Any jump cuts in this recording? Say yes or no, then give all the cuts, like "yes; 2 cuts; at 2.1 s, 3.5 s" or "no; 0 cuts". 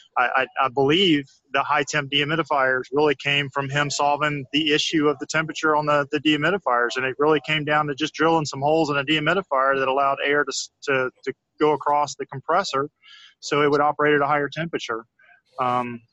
no; 0 cuts